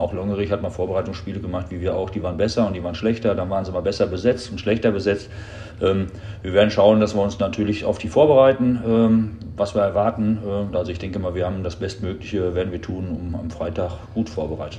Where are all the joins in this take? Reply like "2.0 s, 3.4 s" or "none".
10.7 s